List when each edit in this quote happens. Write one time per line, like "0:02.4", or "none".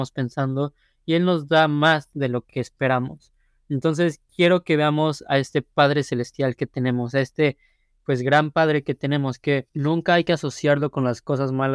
0:09.7